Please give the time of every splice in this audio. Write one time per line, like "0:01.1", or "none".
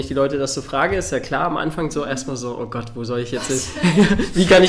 none